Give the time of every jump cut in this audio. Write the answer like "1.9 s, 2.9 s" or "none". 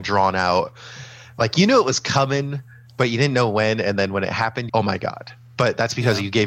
4.7 s